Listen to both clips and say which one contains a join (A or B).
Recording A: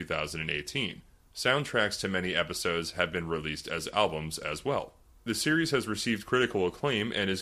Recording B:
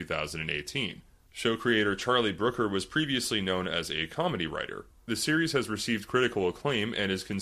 B